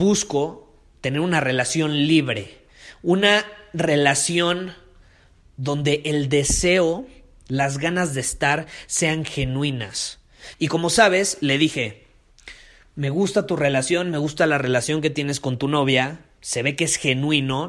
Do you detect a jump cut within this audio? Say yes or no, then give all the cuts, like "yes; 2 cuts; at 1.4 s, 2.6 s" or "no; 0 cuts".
yes; 1 cut; at 10.5 s